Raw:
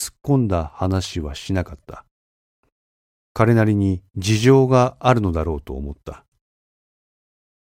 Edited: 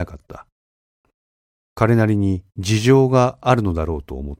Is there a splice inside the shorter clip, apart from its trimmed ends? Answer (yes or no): no